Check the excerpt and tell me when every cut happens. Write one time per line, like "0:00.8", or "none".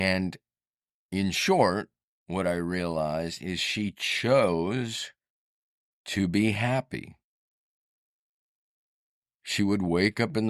none